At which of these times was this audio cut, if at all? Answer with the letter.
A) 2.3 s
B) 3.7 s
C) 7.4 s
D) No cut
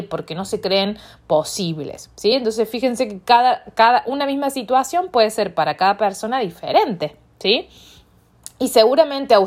D